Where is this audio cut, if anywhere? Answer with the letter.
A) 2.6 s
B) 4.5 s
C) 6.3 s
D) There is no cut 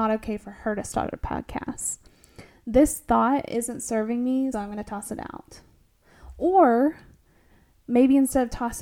B